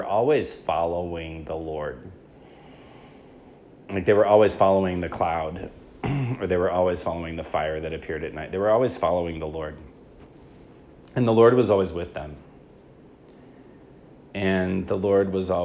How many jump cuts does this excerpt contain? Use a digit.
0